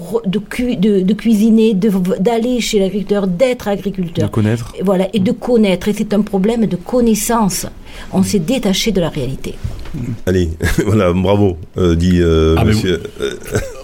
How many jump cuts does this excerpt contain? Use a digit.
0